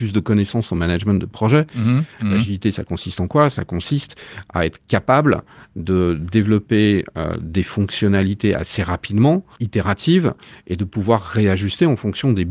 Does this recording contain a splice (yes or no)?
yes